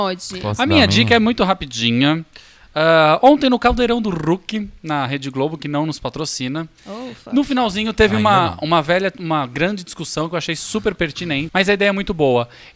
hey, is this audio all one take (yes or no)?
no